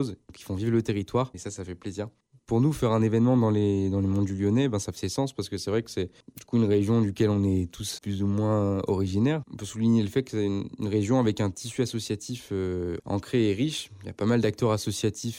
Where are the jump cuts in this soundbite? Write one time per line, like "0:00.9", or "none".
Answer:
0:01.3
0:08.0
0:09.4